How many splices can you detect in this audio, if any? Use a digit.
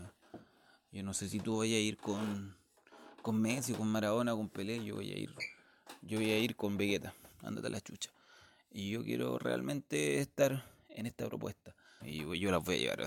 2